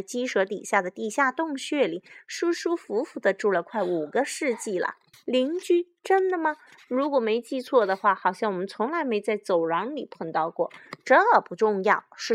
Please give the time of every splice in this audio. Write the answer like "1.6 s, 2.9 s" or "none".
5.1 s